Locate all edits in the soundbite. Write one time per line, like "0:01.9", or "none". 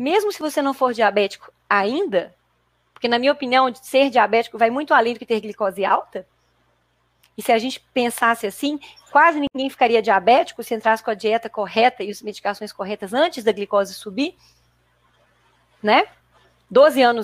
none